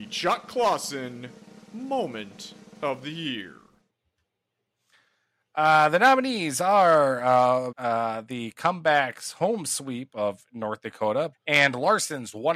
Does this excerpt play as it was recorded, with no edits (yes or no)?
no